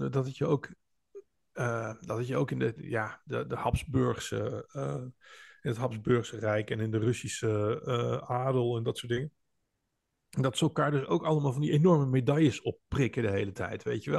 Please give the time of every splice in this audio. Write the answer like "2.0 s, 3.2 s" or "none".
none